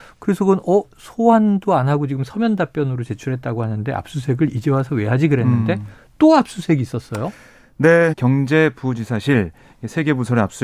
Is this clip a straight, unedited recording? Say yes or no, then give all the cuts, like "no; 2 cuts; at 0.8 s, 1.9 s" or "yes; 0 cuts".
no; 1 cut; at 8.1 s